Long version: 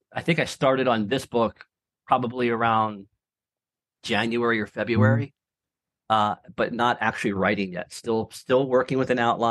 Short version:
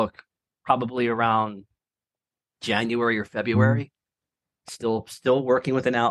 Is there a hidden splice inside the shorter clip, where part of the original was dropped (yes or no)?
yes